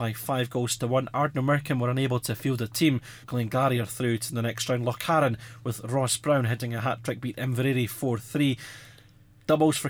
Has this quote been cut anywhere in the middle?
yes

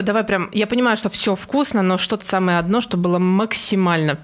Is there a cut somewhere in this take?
yes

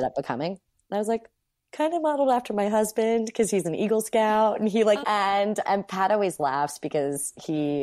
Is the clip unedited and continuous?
no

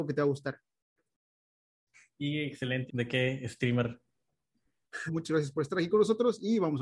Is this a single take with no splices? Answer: no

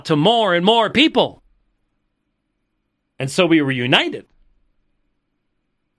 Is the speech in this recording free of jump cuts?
yes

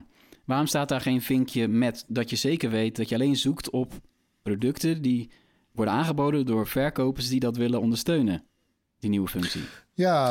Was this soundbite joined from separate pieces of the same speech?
yes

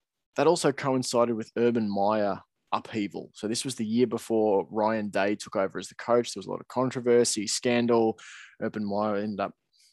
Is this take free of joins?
yes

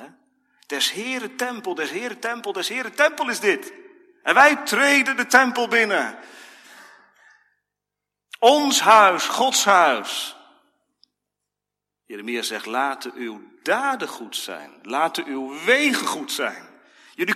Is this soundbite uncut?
yes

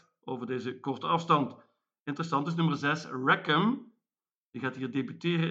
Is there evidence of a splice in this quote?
no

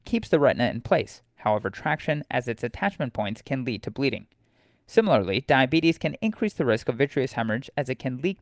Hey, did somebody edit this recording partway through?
no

